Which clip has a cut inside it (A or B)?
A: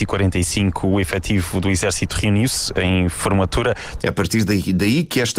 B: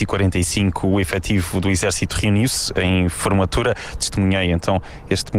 A